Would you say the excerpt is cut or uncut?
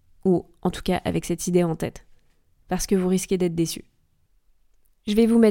uncut